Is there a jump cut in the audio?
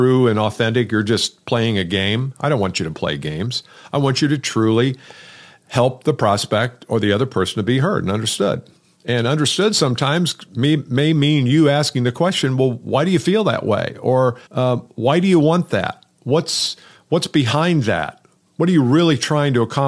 yes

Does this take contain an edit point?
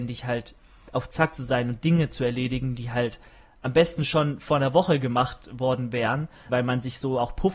yes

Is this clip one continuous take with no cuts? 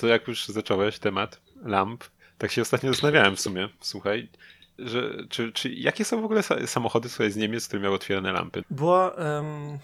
no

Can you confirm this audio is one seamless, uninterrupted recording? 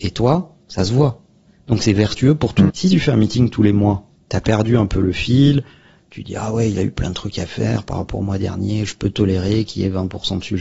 no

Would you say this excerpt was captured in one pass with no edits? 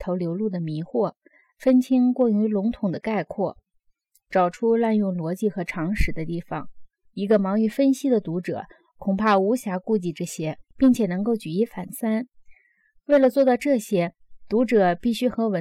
no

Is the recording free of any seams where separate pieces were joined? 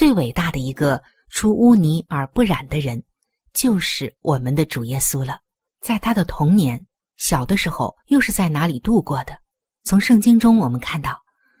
no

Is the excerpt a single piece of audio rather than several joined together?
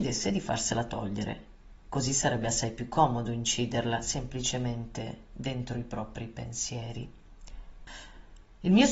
yes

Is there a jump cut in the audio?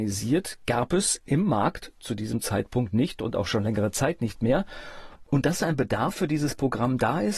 no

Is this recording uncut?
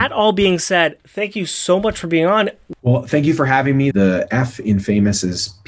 no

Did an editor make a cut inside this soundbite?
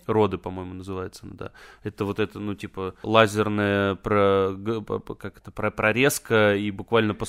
yes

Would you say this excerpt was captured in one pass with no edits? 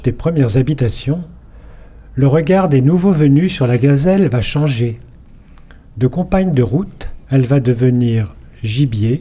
no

